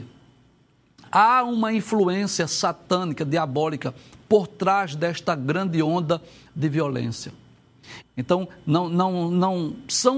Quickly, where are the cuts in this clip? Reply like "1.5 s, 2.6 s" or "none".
8.0 s